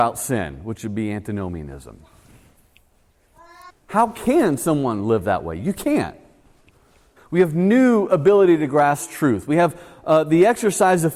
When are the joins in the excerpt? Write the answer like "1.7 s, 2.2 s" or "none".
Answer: 3.7 s, 7.2 s